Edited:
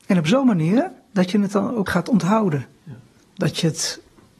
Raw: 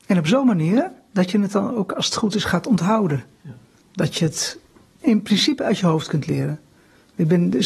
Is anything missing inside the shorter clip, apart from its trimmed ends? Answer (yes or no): yes